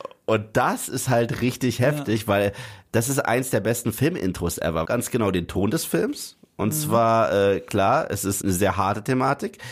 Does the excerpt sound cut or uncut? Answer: cut